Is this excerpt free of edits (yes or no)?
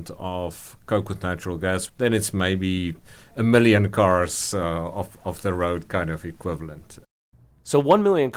yes